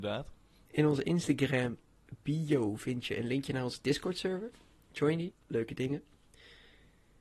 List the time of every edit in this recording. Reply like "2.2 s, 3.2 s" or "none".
5.3 s

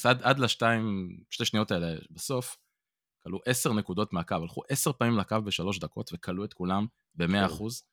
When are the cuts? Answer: 3.1 s

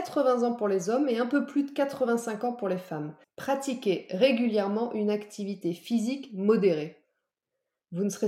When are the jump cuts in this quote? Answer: 3.2 s

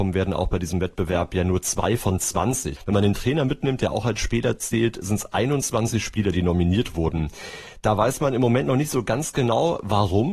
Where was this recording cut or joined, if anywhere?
2.8 s

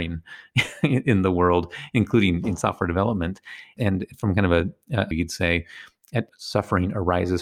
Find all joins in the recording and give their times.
5.1 s, 6.3 s

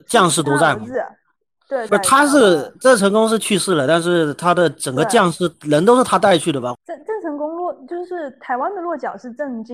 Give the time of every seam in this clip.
1.9 s, 6.7 s

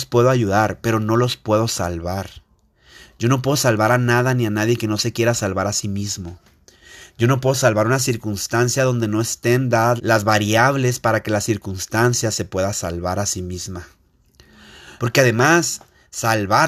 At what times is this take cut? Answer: 10.0 s, 15.0 s

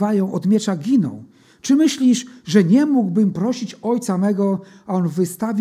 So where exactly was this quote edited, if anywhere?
none

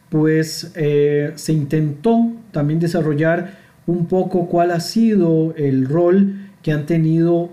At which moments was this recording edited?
none

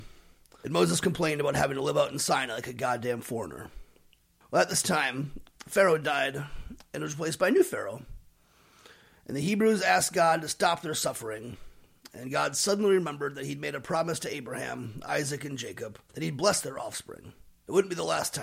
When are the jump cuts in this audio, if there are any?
none

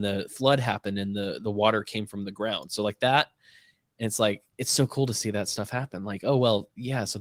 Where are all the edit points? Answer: none

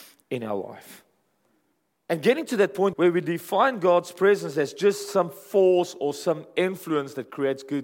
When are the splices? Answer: 2.9 s

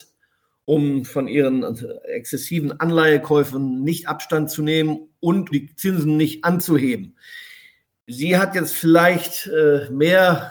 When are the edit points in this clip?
5.5 s

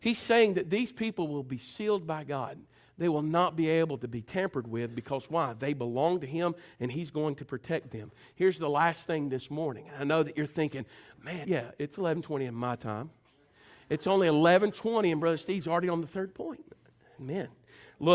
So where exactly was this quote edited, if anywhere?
11.4 s

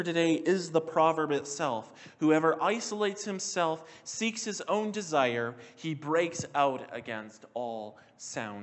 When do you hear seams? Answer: none

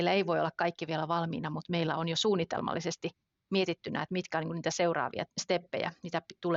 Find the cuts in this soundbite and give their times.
none

